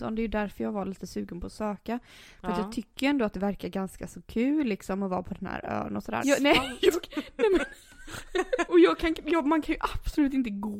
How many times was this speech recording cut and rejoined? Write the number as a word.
two